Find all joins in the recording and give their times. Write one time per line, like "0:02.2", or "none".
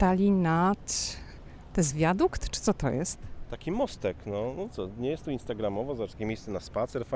none